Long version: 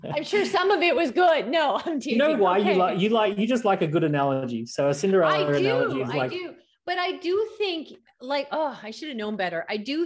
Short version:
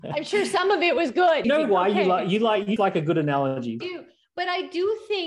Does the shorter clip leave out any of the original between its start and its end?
yes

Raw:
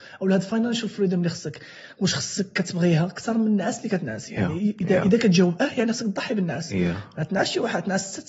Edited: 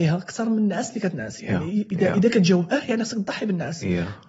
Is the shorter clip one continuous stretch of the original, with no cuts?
yes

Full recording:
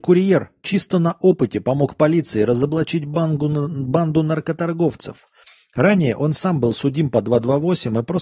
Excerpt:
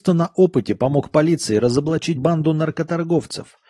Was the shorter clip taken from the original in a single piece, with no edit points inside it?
no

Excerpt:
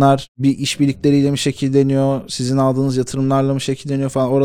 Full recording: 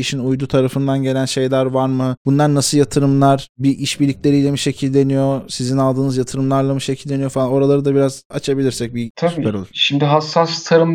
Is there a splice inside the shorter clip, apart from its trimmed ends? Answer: no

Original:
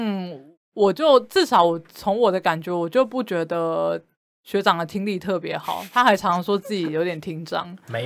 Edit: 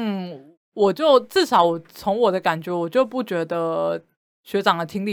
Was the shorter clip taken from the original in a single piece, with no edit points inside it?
yes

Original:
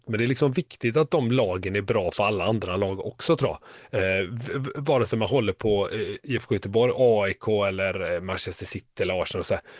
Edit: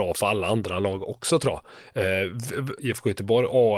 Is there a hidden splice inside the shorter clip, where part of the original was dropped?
yes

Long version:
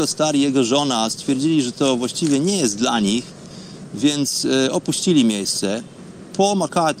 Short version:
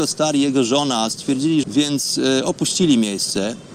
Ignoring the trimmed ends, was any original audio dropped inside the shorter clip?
yes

